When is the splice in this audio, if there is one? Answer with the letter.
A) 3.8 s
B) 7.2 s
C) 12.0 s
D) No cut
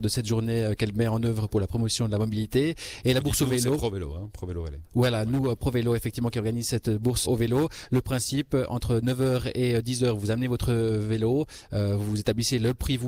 B